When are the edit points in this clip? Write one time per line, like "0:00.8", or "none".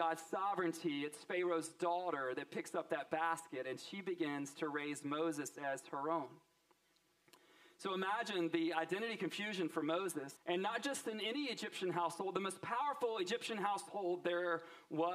0:10.4